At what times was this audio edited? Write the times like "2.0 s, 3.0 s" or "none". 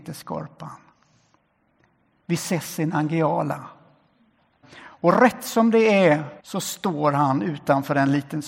4.6 s, 6.4 s